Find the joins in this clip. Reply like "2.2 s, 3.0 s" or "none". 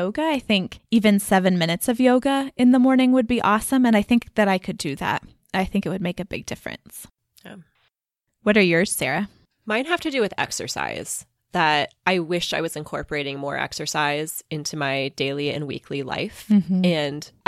none